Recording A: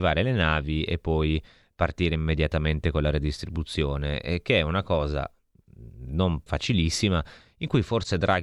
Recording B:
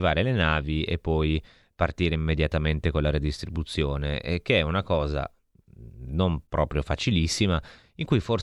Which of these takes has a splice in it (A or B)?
A